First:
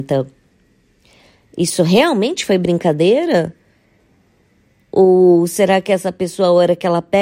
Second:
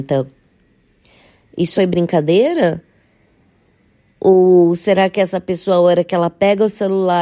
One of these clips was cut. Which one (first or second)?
second